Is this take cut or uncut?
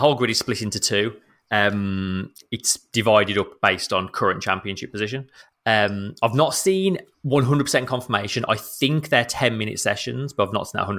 uncut